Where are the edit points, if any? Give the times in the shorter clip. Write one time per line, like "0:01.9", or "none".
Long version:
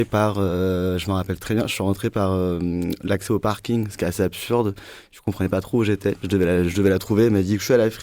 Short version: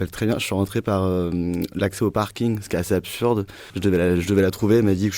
0:03.7

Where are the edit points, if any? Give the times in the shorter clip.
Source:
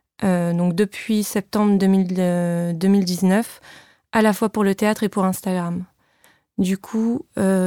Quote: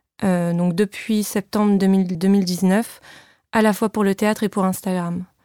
0:02.1

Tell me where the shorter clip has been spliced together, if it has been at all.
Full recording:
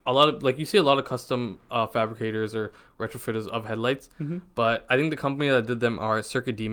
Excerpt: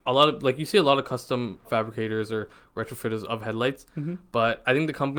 0:01.6

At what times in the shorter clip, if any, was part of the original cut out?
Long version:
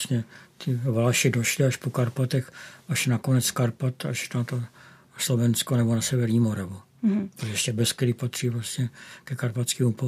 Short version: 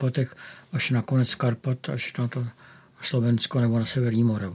none

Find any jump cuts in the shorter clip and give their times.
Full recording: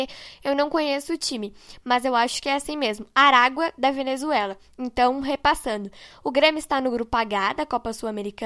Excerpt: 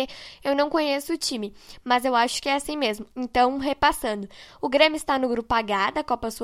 0:03.1

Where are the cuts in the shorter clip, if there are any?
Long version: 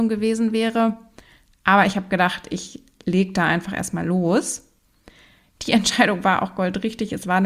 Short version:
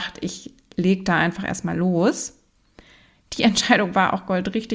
none

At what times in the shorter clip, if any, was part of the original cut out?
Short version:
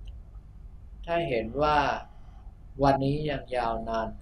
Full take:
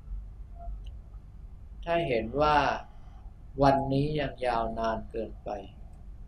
0:03.0

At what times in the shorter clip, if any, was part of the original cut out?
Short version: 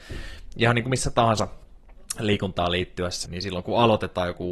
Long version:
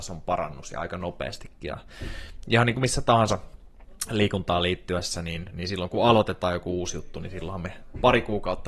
0:03.2

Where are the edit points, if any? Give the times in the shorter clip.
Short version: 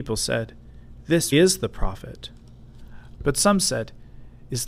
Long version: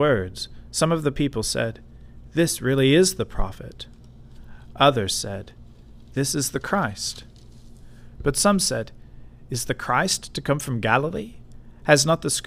0:01.3
0:03.2

